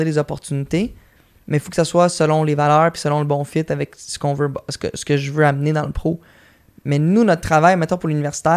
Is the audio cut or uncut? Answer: uncut